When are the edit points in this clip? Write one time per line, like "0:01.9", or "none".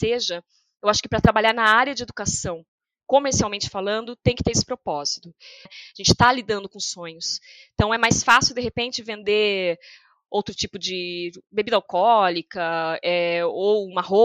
0:05.7